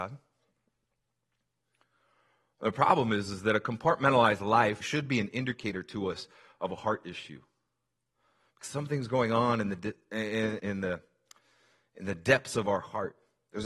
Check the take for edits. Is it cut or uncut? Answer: cut